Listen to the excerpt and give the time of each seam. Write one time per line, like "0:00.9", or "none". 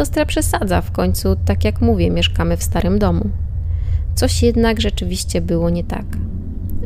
none